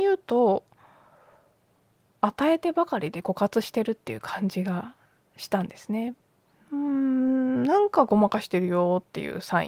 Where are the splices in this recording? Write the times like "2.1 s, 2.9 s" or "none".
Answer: 6.5 s